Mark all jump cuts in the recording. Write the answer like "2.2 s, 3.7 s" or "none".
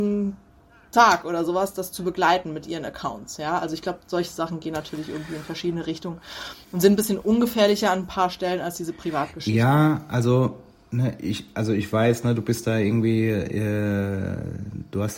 none